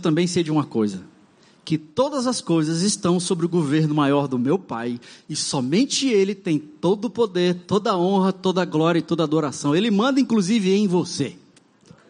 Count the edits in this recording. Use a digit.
0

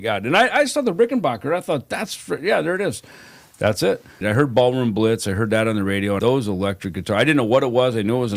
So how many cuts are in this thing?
2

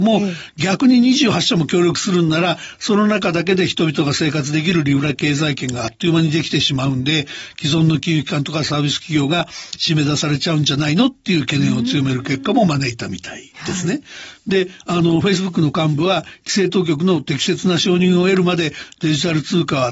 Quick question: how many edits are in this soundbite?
0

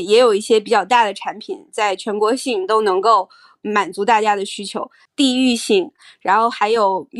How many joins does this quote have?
1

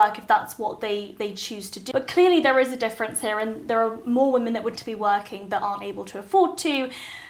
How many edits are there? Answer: 2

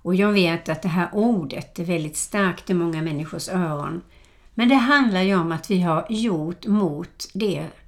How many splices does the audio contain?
0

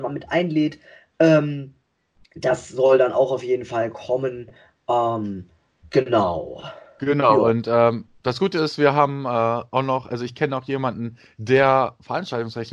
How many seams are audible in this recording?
0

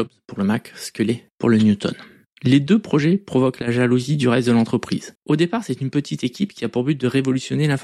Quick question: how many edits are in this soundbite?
2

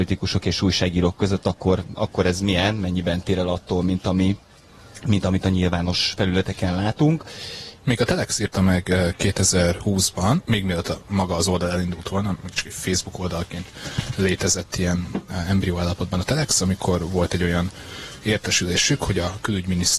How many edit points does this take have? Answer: 1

